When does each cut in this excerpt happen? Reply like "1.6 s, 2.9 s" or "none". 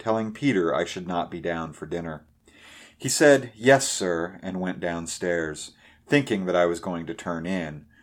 none